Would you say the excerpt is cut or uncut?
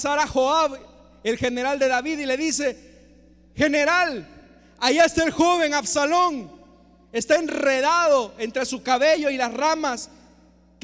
uncut